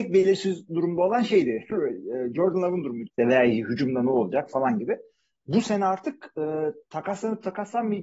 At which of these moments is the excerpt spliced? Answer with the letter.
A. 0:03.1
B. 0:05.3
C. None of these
A